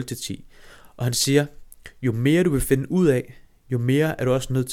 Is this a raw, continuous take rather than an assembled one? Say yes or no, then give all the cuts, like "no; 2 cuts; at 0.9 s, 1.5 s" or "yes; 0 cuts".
yes; 0 cuts